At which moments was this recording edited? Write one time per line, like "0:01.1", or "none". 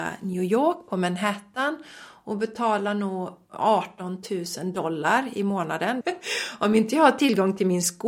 0:06.0